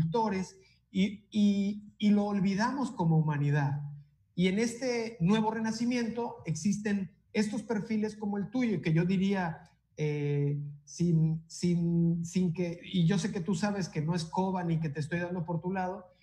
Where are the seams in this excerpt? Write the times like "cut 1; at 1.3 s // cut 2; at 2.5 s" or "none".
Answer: none